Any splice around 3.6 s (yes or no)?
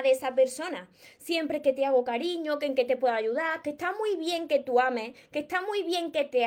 yes